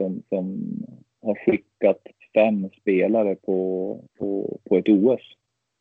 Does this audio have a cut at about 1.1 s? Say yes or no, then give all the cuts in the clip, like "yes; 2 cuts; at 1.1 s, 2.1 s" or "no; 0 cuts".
no; 1 cut; at 4.1 s